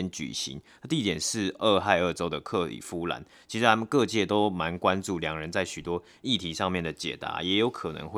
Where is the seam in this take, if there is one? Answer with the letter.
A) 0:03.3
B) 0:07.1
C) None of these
C